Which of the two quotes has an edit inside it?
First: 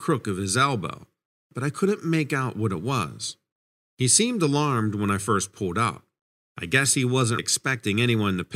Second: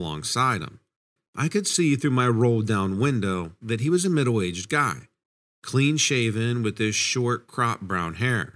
first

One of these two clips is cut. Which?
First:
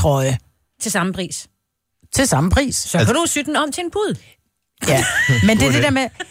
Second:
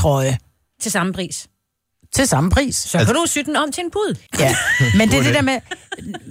second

